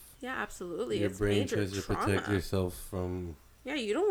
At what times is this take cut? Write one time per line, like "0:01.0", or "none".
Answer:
none